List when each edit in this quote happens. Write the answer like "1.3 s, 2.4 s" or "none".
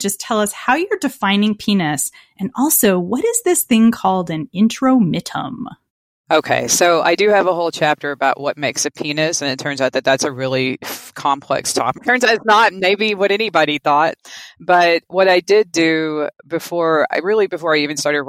12.0 s